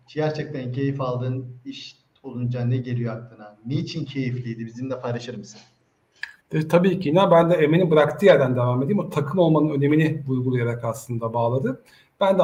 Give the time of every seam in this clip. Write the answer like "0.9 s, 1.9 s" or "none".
6.4 s